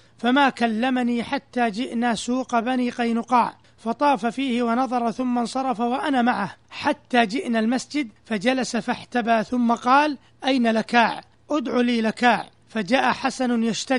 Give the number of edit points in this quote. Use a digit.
1